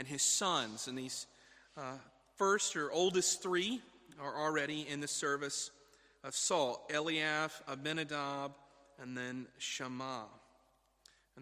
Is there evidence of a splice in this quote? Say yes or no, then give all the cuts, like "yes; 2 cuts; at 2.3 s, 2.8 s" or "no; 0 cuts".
no; 0 cuts